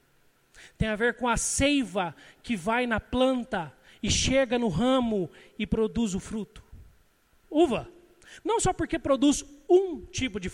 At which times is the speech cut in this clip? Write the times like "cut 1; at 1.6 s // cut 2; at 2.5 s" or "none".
cut 1; at 7.4 s

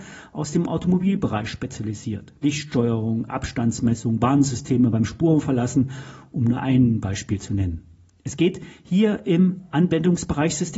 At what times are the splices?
none

